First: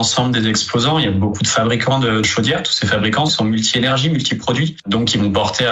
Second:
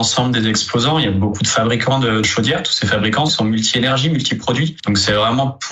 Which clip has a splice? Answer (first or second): second